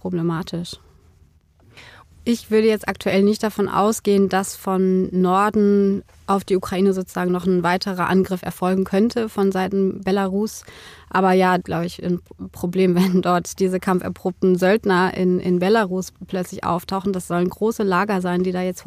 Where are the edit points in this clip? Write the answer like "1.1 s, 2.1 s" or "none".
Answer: 2.0 s, 11.6 s